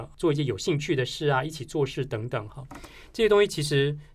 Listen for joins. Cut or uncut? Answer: uncut